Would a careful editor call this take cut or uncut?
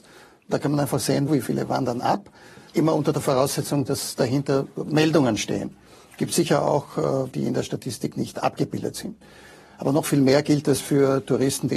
cut